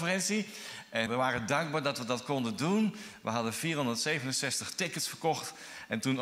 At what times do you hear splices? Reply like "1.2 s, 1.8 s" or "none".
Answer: 1.1 s